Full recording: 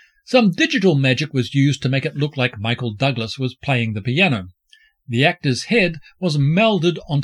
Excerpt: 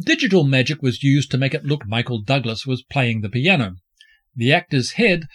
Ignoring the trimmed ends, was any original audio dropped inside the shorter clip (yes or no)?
yes